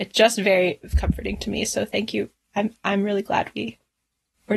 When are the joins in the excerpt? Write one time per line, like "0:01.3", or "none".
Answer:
none